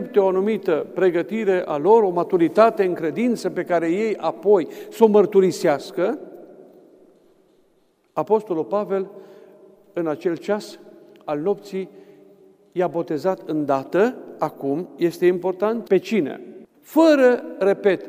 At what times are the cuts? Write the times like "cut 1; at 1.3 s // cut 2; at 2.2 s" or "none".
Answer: cut 1; at 16.7 s